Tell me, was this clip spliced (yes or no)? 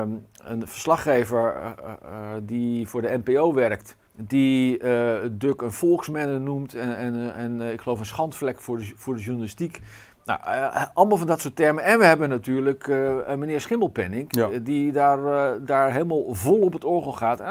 yes